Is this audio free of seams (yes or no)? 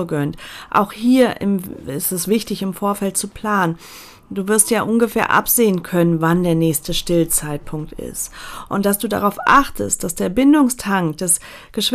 yes